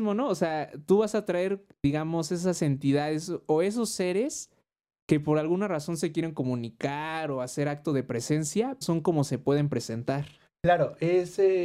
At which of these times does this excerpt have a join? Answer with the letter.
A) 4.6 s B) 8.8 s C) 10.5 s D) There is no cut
B